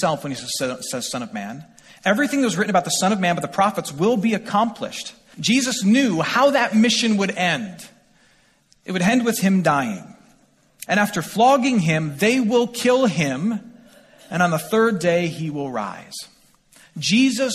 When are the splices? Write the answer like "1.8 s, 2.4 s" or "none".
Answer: 5.3 s, 10.9 s